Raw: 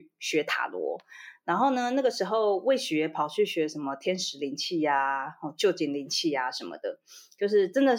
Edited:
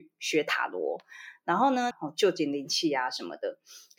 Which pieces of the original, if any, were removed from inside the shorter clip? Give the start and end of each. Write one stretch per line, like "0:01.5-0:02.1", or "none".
0:01.9-0:05.3